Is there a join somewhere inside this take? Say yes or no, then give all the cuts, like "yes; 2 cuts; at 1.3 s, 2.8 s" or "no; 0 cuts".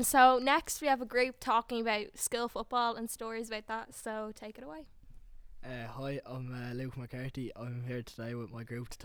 yes; 1 cut; at 7.5 s